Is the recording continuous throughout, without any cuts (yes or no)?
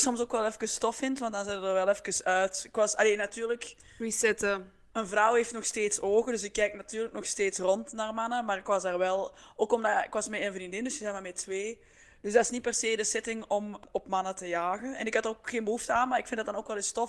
yes